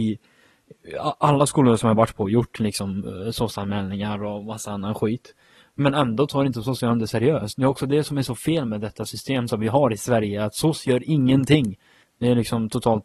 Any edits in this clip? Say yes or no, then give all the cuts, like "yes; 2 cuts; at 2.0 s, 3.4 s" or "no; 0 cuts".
yes; 1 cut; at 12.0 s